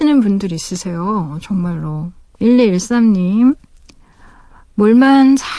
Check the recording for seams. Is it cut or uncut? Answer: cut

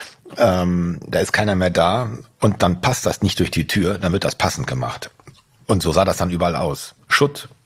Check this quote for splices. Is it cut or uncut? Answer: uncut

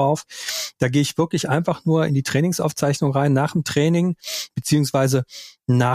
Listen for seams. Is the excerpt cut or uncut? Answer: uncut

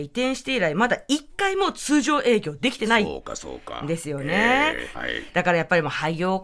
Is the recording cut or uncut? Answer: cut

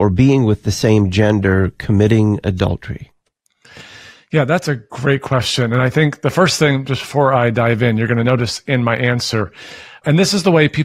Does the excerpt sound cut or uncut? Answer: uncut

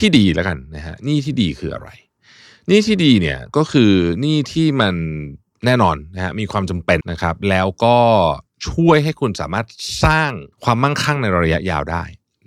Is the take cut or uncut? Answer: cut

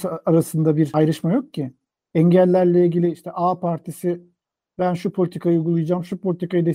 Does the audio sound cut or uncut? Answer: cut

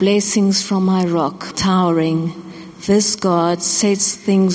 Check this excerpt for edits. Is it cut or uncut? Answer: cut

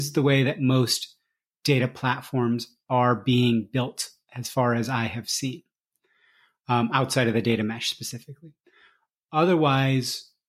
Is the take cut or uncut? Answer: uncut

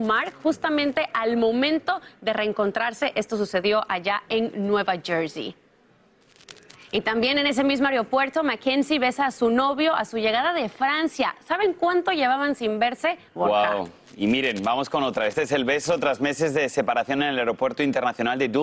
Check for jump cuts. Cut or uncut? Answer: cut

